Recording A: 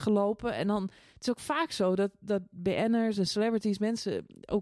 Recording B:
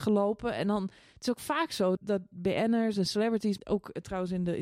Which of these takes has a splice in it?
B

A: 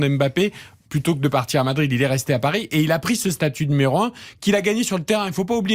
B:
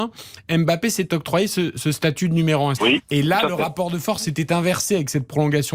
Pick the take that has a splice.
B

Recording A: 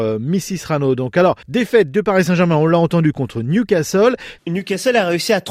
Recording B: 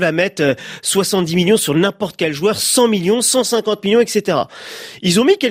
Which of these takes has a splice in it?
A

